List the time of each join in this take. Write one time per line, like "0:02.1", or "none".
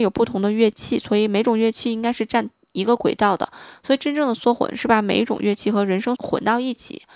0:06.2